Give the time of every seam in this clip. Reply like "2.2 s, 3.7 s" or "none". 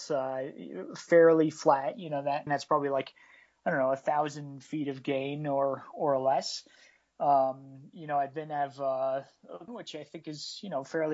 2.5 s, 9.7 s